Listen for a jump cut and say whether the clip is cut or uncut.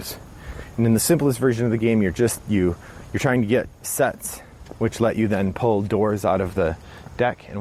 uncut